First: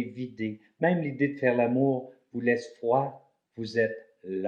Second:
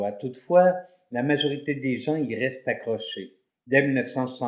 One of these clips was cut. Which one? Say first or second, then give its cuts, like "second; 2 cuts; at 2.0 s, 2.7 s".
second; 1 cut; at 3.5 s